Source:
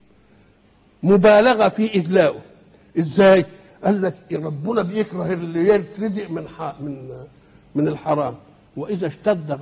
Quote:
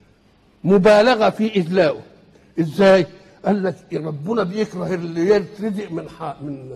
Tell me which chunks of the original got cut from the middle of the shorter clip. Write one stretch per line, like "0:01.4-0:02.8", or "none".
none